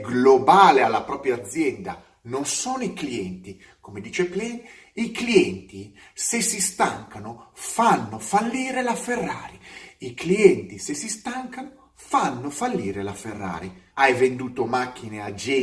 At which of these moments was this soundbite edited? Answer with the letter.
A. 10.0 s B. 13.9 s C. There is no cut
B